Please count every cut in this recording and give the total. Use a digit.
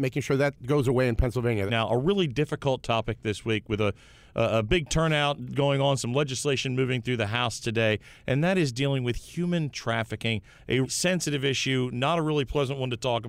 2